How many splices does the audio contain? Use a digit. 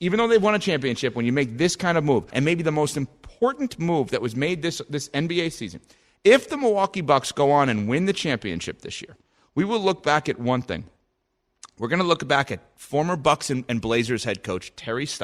1